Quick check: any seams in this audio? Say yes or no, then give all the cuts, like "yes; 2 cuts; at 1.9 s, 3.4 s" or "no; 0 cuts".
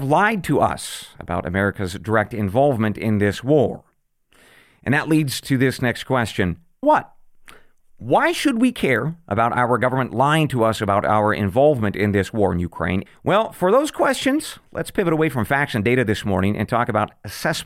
yes; 2 cuts; at 6.8 s, 13.1 s